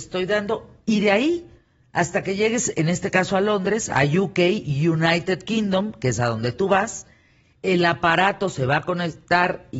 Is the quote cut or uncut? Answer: uncut